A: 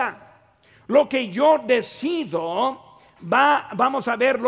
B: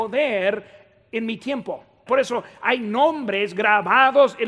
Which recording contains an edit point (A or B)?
B